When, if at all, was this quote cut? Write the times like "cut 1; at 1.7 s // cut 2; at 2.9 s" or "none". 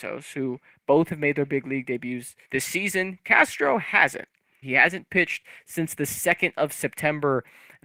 cut 1; at 2.4 s // cut 2; at 4.6 s